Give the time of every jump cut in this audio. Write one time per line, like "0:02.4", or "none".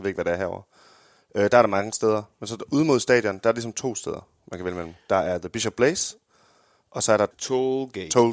none